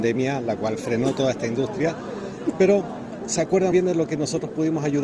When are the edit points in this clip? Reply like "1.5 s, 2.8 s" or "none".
3.7 s